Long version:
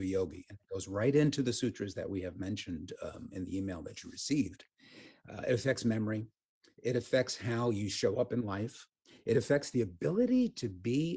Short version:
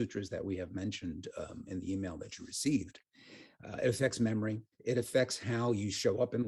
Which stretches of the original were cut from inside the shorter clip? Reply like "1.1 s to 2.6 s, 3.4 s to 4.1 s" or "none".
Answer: 6.4 s to 6.7 s